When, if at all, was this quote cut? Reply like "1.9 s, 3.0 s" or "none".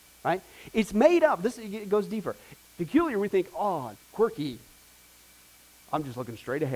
2.6 s, 4.0 s